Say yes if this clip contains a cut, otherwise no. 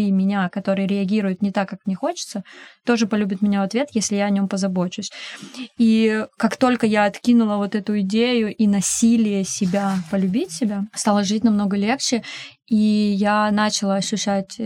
no